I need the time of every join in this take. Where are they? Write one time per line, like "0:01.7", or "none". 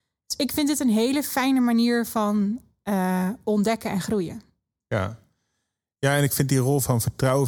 none